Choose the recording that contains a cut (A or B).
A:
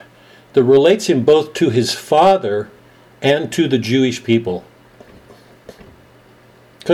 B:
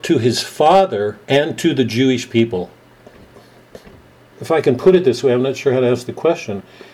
B